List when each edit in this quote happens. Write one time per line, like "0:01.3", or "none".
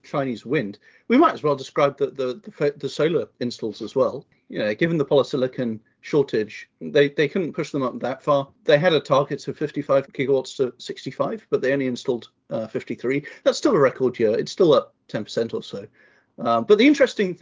none